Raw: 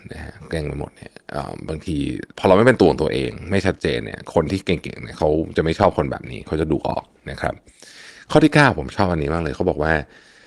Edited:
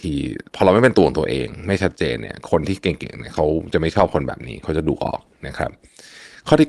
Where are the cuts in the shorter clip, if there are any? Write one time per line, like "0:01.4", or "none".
none